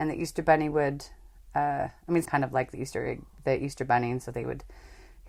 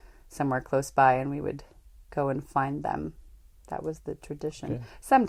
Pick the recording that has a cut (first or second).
first